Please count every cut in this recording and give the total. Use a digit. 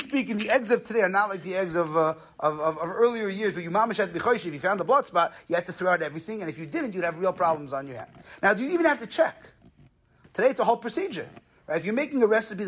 1